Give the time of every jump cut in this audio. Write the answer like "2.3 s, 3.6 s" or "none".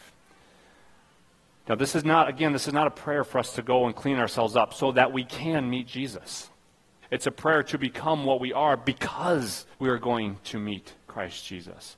7.0 s, 9.7 s

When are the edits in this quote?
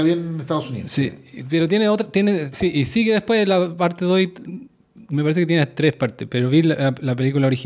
2.5 s

